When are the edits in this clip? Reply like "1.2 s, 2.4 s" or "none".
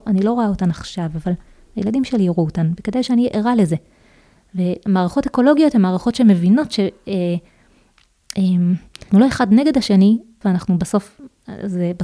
9.1 s, 10.4 s

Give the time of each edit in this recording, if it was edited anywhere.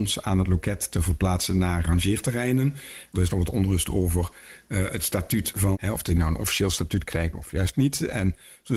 5.7 s

